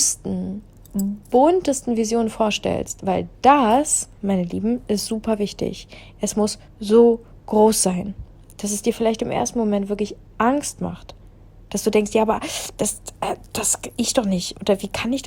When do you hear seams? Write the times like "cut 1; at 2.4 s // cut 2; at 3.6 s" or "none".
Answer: cut 1; at 6.7 s